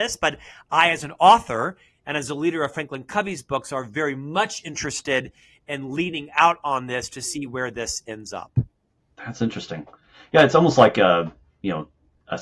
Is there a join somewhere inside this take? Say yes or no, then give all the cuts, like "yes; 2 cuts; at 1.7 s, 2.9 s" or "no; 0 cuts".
no; 0 cuts